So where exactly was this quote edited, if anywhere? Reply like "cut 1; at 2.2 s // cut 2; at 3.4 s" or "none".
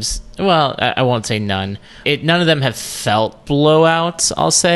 cut 1; at 2.0 s // cut 2; at 3.4 s